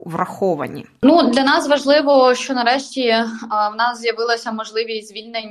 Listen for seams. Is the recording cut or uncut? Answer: uncut